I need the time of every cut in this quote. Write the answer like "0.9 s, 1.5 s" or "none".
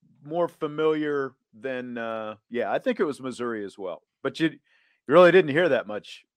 2.4 s, 4.1 s

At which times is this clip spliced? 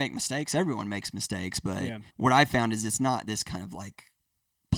2.1 s

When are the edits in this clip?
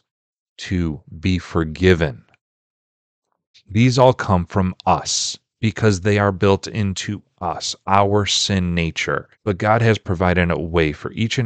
3.5 s, 9.3 s

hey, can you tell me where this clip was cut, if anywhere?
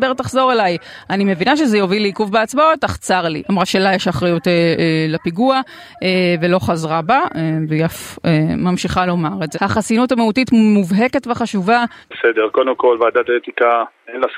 3.4 s, 9.5 s, 12.0 s

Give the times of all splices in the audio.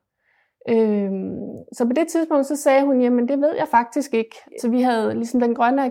4.6 s

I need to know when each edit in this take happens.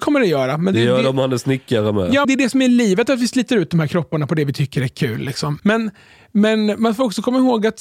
2.2 s, 5.6 s

